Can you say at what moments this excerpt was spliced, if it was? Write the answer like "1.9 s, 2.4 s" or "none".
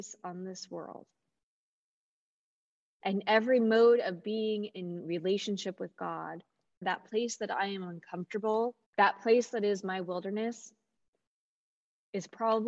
6.8 s, 8.8 s